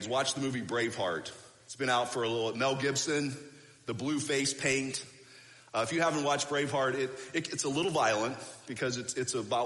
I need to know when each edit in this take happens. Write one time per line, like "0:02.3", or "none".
none